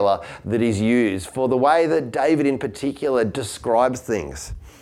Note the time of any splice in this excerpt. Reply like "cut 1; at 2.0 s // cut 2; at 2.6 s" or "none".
none